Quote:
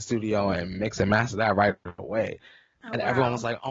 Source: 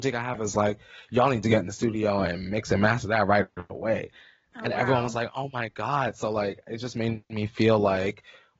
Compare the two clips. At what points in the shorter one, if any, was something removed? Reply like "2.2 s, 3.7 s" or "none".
none